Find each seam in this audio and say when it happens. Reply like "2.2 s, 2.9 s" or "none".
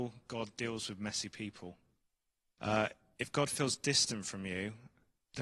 2.6 s